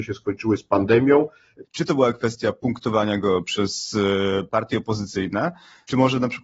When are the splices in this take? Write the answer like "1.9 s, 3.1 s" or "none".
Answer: 1.6 s

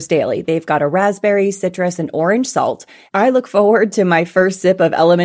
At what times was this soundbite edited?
3.1 s

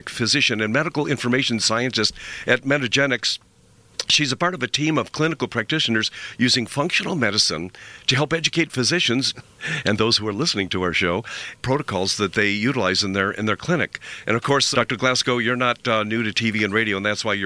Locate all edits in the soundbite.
9.3 s, 11.5 s, 14.7 s

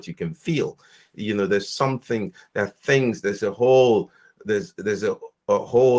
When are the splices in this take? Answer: none

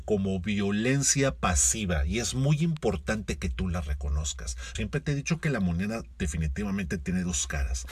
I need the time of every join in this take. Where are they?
4.8 s

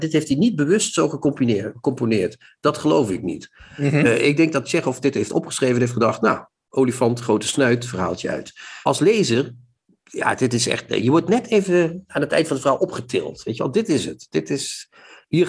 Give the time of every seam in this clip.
8.8 s

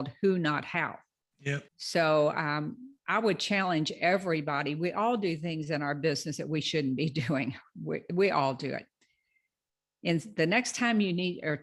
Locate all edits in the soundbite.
1.7 s, 3.0 s

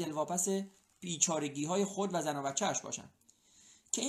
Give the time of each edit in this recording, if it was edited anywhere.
none

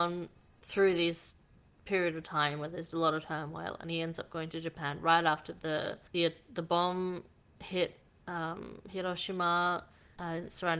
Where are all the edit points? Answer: none

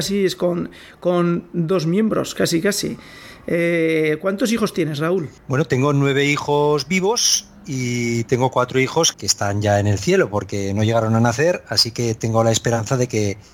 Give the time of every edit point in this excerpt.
5.4 s, 9.1 s

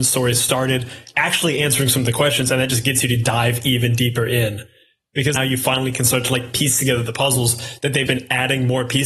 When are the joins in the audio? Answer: 5.4 s, 8.1 s

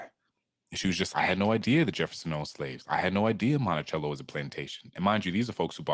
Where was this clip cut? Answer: none

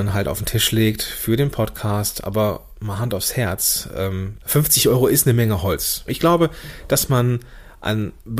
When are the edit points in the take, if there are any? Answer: 4.4 s, 6.1 s

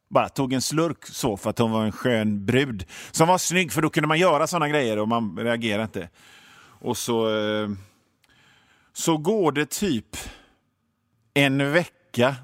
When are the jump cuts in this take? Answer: none

